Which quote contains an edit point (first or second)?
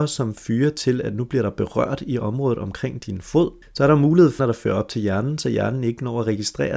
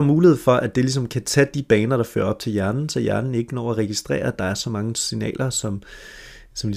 first